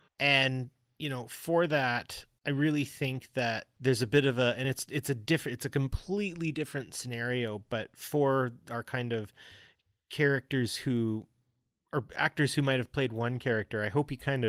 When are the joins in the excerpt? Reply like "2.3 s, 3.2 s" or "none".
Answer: none